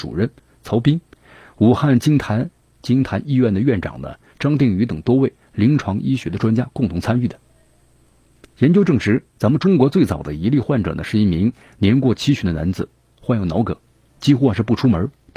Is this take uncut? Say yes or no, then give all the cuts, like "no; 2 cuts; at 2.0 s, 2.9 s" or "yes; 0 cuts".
no; 1 cut; at 14.1 s